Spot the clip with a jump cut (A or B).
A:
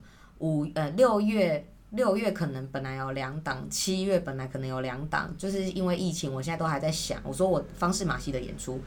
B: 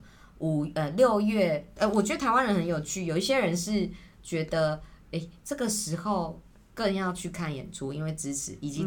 B